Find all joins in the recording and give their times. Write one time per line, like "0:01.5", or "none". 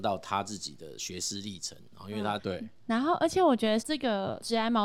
0:01.0
0:02.4
0:03.8

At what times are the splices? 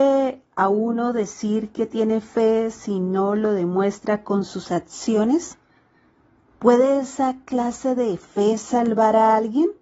none

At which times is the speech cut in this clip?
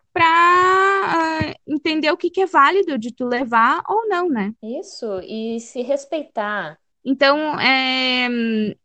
0:04.6
0:06.9

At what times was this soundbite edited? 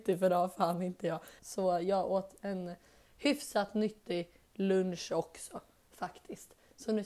0:01.4

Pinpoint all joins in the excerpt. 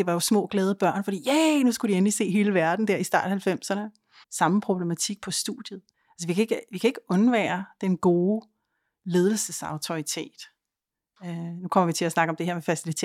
0:04.2
0:05.9

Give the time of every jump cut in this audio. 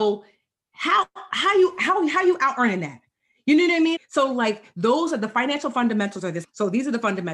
0:04.0
0:06.4

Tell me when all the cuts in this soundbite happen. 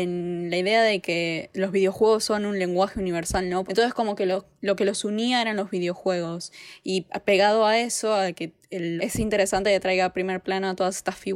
0:03.7
0:09.0

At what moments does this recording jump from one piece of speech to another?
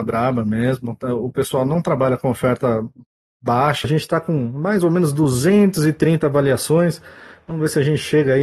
0:03.8

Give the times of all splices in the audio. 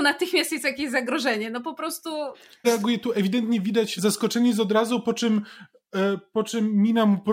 0:02.6
0:04.0

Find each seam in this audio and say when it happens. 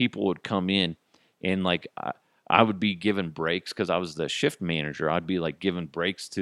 none

